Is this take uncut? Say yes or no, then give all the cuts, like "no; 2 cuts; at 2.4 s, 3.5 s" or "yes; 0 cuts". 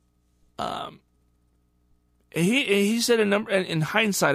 yes; 0 cuts